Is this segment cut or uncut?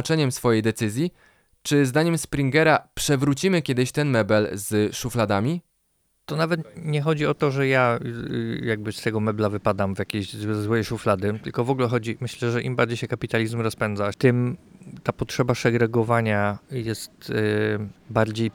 cut